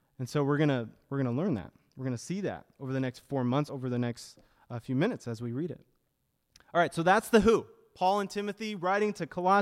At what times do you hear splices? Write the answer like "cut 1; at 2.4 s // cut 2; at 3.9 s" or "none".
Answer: none